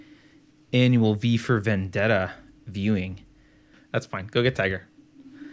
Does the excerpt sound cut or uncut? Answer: cut